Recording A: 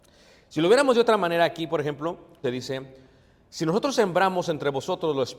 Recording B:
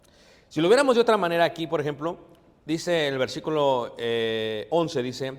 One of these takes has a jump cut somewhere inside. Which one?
A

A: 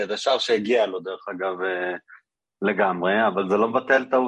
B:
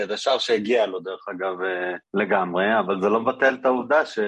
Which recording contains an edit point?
B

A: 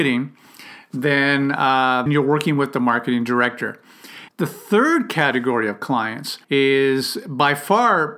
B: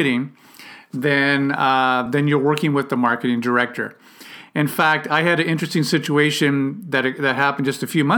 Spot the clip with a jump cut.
A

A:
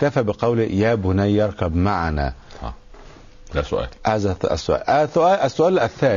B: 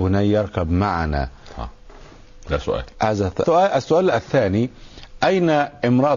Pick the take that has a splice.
B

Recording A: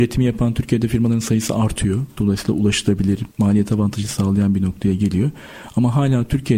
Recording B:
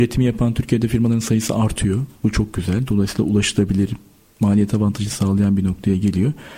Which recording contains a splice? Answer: A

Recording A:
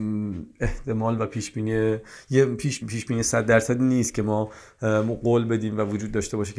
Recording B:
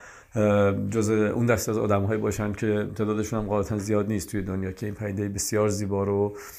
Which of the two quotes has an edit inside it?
A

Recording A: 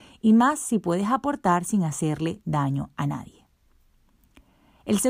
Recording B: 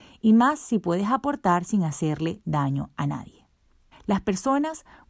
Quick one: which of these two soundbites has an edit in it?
B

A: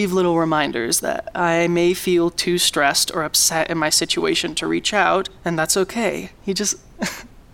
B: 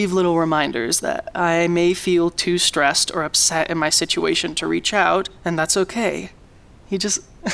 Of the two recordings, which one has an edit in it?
A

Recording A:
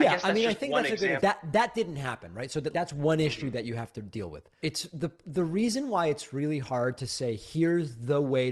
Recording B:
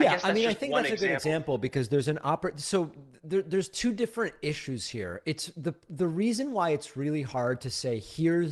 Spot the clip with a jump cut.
A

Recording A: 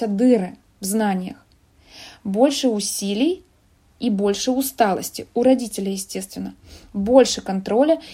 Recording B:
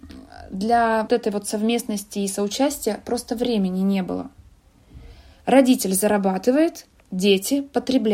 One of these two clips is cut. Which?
B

